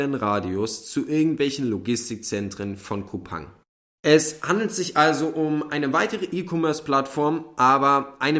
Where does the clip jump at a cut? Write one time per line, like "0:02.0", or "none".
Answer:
0:04.0